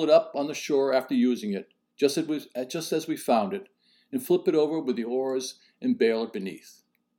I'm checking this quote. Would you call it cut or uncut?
uncut